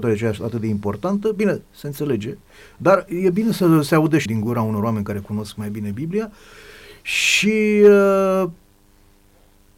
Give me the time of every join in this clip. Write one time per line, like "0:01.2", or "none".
0:04.3

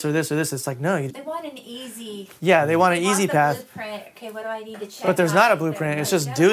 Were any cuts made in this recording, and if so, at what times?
0:01.1

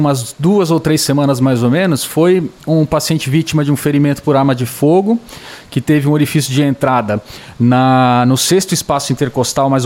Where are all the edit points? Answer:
none

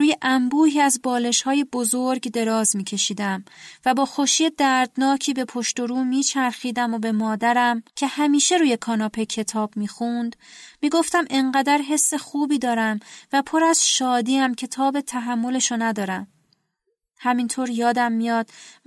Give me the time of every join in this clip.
0:07.9

